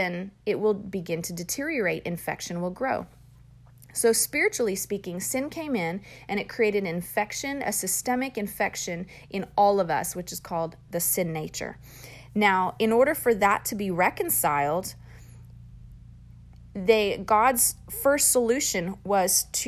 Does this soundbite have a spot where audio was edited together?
no; 0 cuts

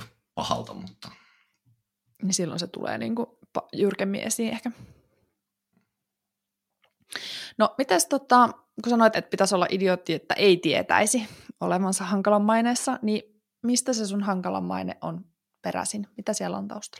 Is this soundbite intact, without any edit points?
no; 1 cut; at 9.1 s

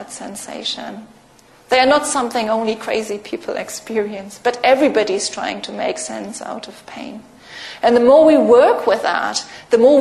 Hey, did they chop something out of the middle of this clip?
no; 0 cuts

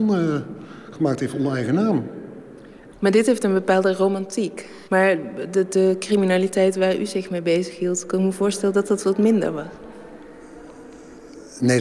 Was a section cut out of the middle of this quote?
yes; 1 cut; at 4.9 s

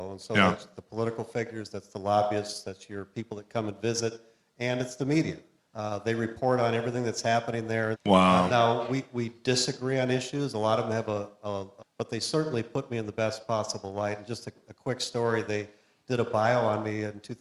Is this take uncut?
no; 3 cuts; at 5.6 s, 7.9 s, 11.8 s

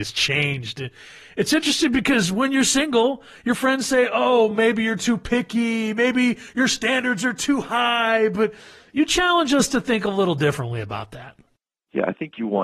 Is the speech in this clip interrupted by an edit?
no; 0 cuts

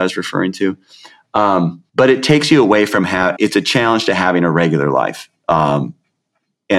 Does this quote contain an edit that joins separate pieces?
yes; 2 cuts; at 1.9 s, 3.4 s

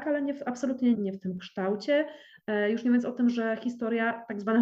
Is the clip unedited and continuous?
no; 1 cut; at 0.9 s

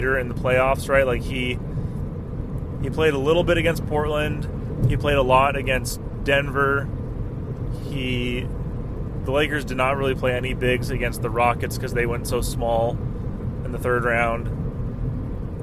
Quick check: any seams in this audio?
no; 0 cuts

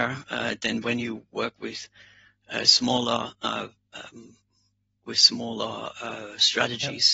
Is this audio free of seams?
yes; 0 cuts

